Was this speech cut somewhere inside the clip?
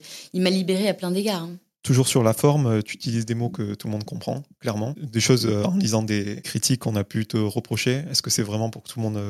no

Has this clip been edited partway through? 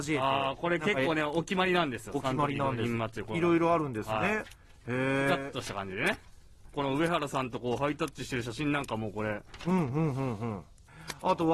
yes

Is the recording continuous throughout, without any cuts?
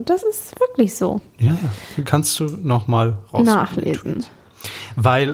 yes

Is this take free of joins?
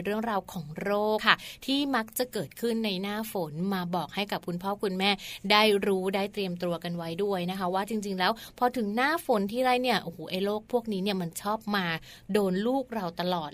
no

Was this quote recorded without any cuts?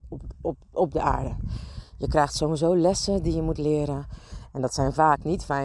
yes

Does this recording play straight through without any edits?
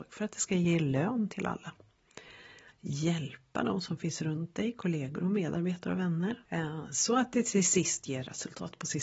no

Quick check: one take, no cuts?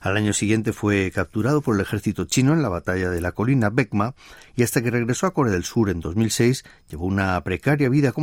yes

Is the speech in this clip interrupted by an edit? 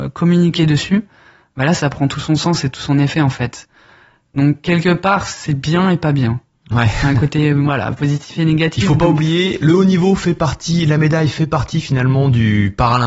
no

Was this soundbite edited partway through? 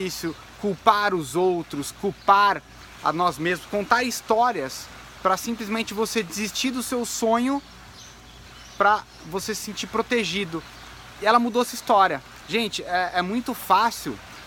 yes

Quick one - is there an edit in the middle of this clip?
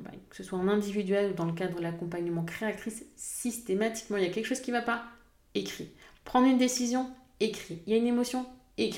no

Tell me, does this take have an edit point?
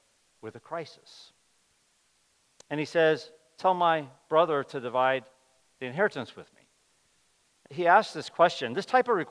yes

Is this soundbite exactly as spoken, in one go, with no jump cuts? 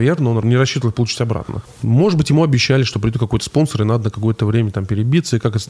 yes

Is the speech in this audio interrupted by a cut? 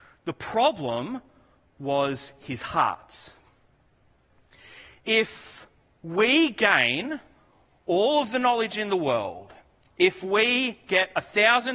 no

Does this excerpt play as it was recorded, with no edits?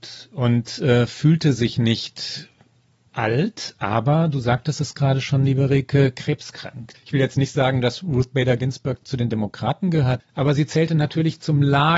no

